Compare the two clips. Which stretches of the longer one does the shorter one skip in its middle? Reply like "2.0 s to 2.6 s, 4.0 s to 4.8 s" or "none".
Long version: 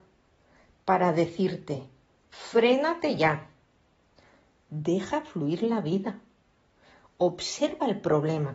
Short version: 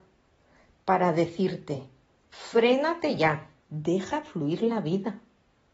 3.6 s to 4.6 s